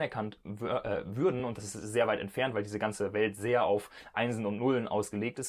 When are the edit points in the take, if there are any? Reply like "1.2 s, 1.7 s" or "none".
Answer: none